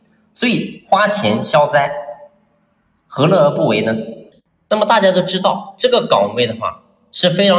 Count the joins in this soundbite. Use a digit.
1